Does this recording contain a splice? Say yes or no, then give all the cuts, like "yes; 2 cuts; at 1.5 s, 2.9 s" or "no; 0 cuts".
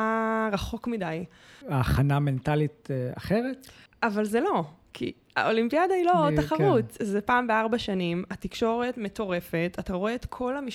yes; 2 cuts; at 1.6 s, 3.9 s